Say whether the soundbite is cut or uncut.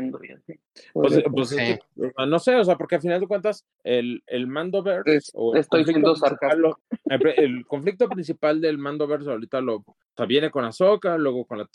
uncut